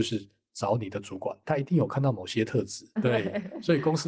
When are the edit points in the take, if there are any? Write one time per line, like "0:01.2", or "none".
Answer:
0:01.4
0:03.0